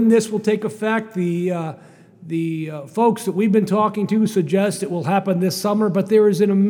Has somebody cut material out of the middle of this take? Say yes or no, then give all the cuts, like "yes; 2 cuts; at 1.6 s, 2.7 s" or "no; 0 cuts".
no; 0 cuts